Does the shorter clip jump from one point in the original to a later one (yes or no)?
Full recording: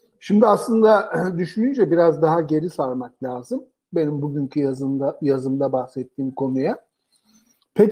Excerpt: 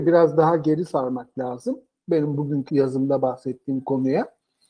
yes